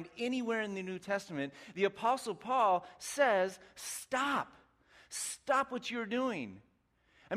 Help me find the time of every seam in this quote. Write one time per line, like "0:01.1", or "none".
none